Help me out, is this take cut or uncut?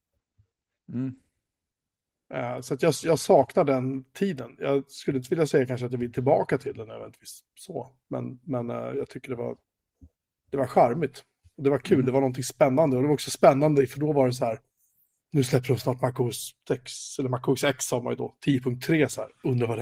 uncut